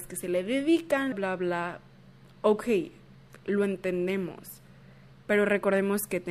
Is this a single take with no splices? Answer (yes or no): no